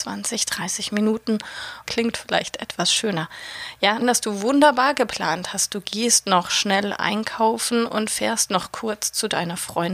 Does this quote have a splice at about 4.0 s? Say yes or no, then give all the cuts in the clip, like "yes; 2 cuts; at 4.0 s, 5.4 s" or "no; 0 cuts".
yes; 2 cuts; at 1.8 s, 4.0 s